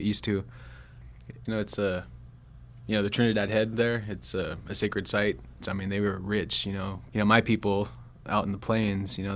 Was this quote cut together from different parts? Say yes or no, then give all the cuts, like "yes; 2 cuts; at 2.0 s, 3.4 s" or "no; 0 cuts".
yes; 3 cuts; at 1.5 s, 5.6 s, 7.1 s